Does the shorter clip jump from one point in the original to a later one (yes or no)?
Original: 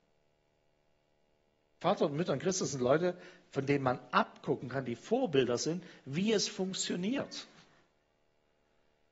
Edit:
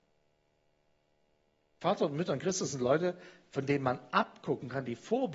no